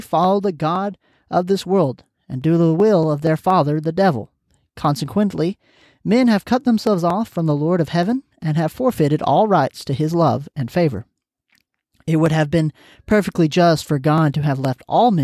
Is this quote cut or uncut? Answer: uncut